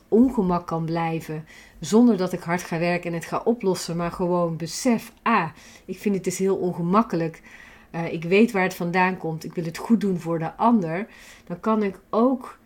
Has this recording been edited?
no; 0 cuts

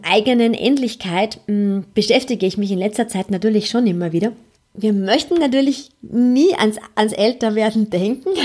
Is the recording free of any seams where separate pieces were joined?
no; 1 cut; at 4.5 s

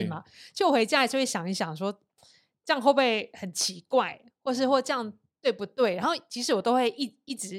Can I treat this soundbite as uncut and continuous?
yes; 0 cuts

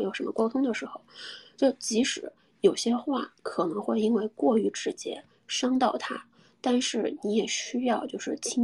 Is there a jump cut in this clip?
no; 0 cuts

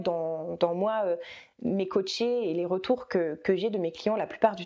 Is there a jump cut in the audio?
no; 0 cuts

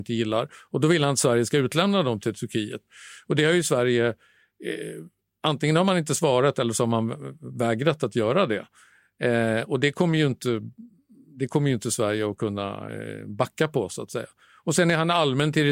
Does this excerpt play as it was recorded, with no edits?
yes; 0 cuts

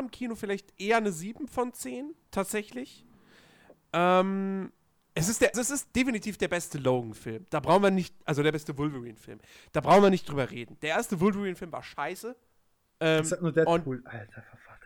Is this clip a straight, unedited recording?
no; 3 cuts; at 2.2 s, 5.5 s, 12.9 s

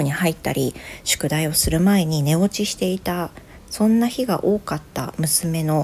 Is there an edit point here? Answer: no; 0 cuts

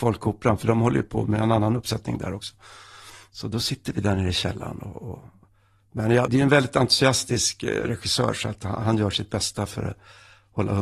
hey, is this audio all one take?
no; 1 cut; at 6.3 s

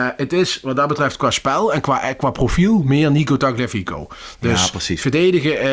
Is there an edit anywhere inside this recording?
no; 0 cuts

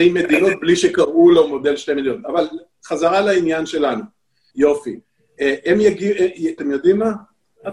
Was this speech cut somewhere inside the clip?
yes; 2 cuts; at 4.5 s, 6.6 s

